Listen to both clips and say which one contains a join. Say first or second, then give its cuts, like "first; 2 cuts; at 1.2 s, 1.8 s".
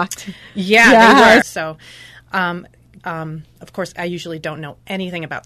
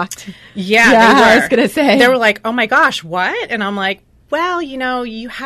first; 2 cuts; at 1.4 s, 3.0 s